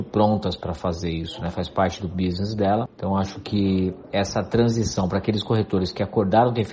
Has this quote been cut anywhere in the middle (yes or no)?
no